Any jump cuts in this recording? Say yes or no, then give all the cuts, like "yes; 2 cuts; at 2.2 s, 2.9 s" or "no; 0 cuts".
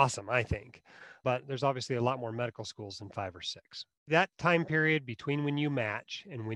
yes; 1 cut; at 4.1 s